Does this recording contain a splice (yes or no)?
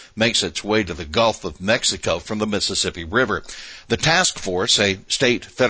no